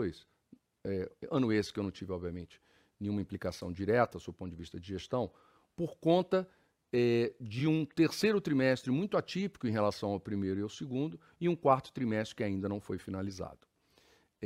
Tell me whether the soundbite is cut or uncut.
uncut